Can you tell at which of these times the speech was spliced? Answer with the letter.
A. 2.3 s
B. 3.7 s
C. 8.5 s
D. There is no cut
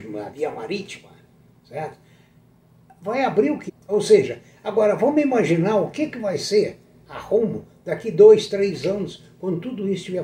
B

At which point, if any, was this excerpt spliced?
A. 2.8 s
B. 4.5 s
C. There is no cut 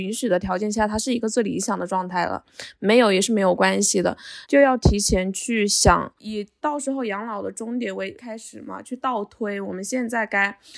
B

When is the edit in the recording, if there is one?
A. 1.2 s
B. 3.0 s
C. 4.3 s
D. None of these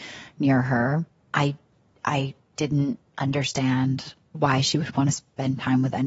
C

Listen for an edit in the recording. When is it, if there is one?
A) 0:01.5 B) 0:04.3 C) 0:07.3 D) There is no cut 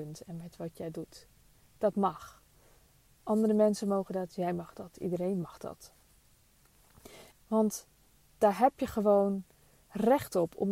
C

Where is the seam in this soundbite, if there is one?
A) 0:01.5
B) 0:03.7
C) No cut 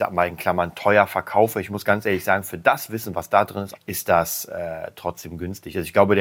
B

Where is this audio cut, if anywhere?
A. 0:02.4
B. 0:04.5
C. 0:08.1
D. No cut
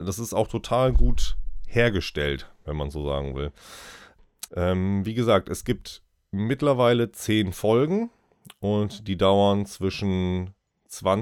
B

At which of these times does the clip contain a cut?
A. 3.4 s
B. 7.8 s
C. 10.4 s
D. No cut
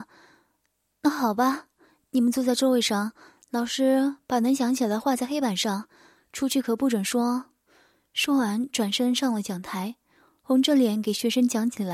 D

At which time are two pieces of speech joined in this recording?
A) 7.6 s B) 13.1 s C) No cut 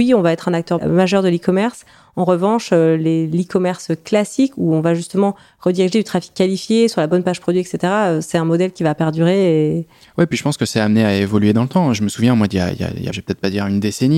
B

